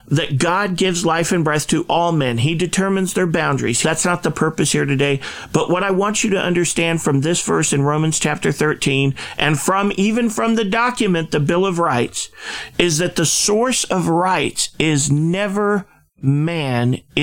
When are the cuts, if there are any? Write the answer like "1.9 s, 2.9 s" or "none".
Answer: 3.8 s